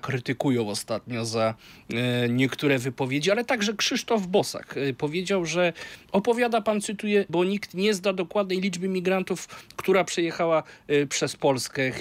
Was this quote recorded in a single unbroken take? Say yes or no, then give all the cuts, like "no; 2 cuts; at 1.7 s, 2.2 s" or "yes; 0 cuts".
no; 1 cut; at 7.3 s